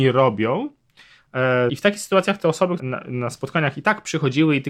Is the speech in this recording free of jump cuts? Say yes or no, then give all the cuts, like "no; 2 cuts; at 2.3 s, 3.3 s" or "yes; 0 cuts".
no; 2 cuts; at 1.7 s, 2.8 s